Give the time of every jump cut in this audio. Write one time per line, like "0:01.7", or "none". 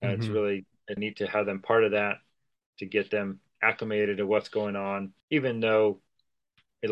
0:01.0
0:05.2